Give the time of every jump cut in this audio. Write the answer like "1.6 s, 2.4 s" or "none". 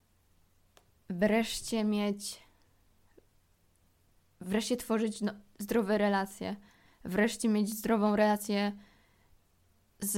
none